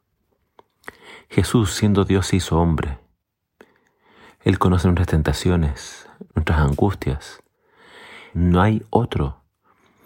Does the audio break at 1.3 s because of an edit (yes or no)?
no